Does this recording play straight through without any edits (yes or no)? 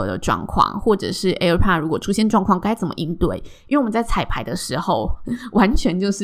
yes